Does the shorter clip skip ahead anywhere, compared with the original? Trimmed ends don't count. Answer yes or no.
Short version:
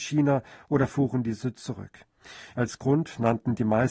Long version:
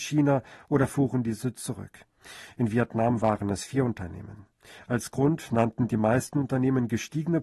yes